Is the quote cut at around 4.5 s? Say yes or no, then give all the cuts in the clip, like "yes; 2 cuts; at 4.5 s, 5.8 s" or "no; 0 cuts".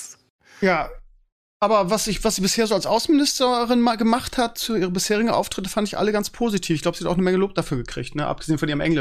no; 0 cuts